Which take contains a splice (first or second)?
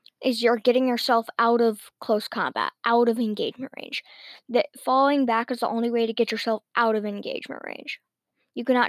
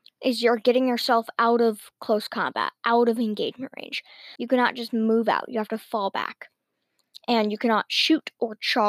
second